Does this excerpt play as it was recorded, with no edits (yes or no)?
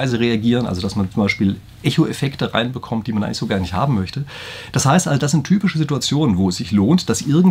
yes